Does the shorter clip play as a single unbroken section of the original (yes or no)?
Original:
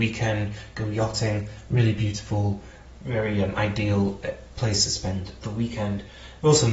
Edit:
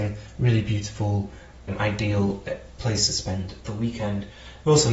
no